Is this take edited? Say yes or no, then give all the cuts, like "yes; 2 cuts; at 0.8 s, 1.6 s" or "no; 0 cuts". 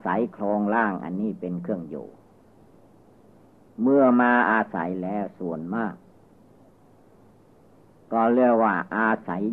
no; 0 cuts